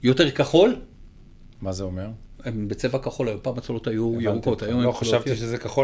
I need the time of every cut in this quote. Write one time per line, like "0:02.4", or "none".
none